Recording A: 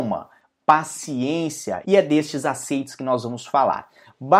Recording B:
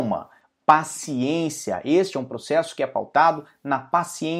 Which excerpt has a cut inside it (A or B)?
A